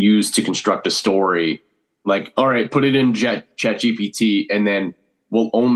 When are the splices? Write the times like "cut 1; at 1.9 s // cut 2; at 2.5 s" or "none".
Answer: none